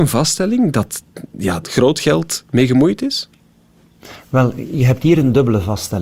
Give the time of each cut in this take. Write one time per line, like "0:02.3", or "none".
0:01.6